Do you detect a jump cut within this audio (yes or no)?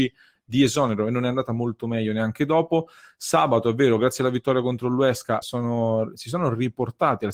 yes